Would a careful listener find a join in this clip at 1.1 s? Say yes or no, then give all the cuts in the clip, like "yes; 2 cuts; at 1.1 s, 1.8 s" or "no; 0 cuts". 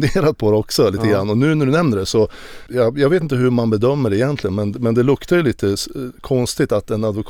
no; 1 cut; at 2.7 s